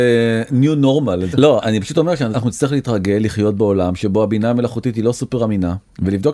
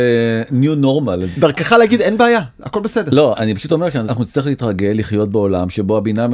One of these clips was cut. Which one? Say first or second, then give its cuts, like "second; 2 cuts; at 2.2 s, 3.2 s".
first; 1 cut; at 1.3 s